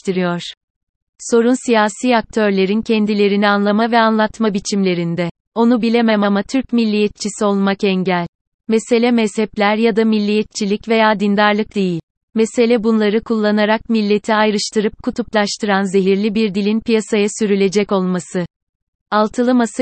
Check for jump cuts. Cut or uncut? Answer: cut